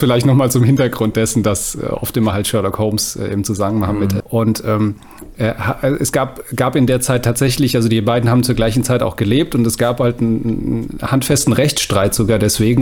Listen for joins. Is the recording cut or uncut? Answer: cut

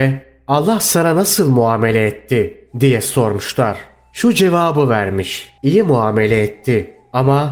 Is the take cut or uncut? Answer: cut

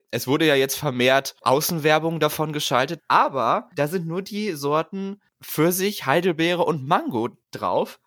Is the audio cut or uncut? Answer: cut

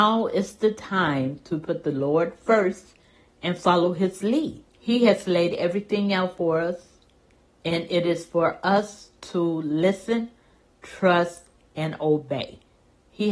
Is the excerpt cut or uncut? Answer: cut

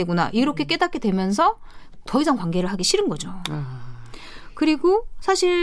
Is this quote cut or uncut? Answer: uncut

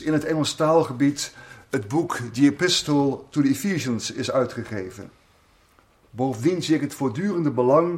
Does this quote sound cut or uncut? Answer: uncut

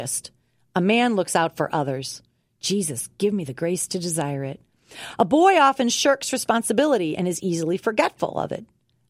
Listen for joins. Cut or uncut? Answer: uncut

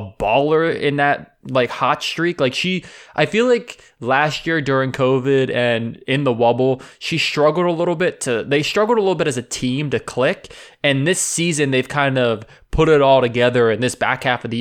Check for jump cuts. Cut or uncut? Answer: uncut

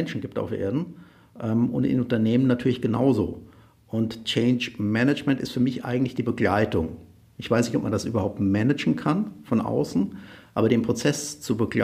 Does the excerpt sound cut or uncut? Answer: uncut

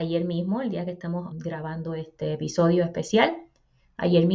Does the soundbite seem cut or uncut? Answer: cut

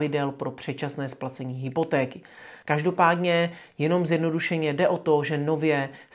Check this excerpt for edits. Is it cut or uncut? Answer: cut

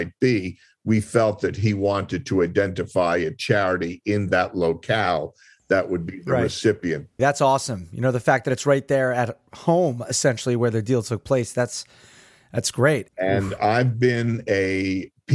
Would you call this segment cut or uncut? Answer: cut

